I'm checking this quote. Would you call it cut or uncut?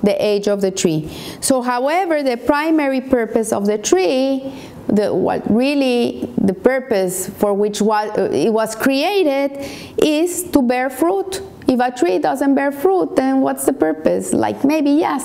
uncut